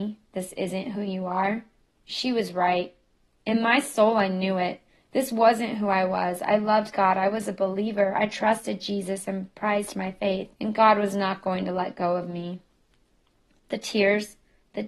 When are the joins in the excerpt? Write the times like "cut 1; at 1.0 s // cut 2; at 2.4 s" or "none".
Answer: cut 1; at 10.5 s